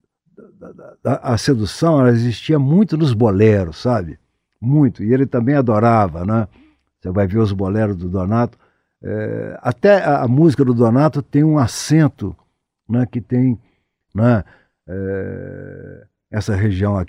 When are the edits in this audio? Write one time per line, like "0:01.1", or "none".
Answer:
0:14.1